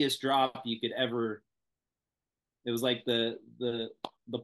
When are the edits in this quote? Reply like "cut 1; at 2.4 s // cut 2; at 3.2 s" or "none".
none

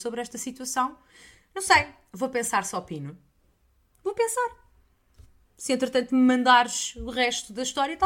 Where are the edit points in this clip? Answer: none

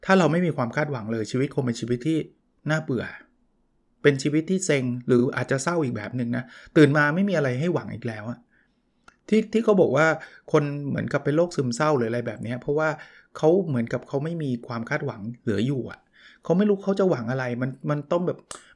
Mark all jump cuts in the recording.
none

